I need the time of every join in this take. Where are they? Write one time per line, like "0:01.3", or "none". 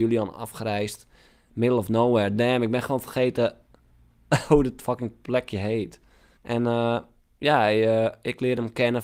0:06.4